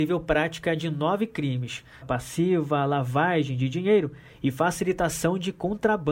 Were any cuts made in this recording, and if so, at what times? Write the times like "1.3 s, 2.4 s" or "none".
2.0 s